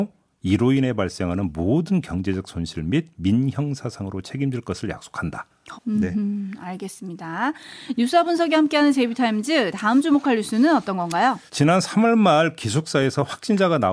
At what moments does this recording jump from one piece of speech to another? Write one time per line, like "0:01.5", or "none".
0:05.7
0:11.5